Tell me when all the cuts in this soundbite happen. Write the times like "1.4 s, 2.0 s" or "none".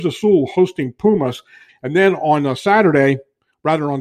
1.7 s